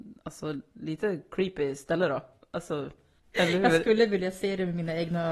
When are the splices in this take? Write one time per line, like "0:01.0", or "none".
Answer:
0:03.2